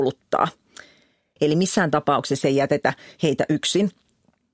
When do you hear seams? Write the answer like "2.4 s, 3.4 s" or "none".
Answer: 1.4 s